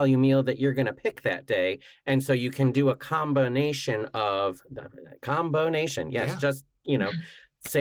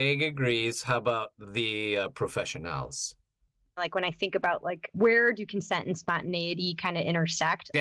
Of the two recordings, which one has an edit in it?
second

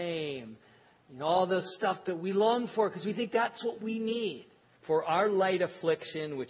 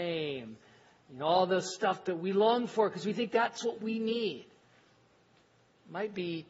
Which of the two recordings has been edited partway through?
first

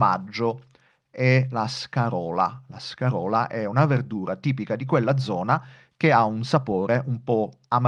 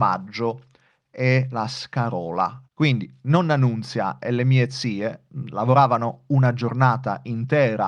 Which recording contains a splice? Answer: second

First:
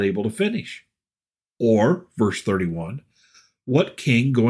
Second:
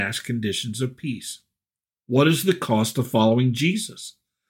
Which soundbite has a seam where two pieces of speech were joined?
second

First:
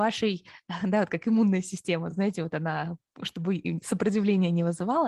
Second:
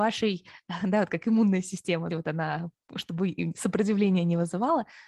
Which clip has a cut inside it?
second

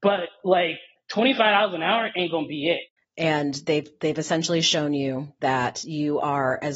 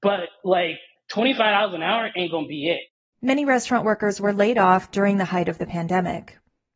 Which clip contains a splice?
first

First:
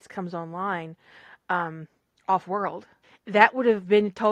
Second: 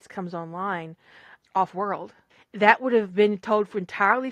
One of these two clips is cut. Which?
second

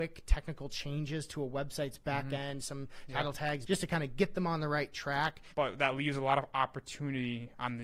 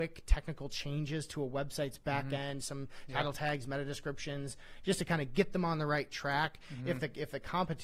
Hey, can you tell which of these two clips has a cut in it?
first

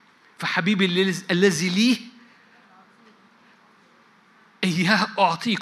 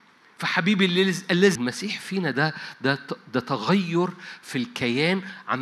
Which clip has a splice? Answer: second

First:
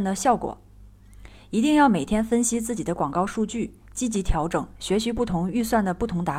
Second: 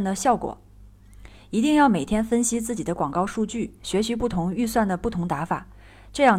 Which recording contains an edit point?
second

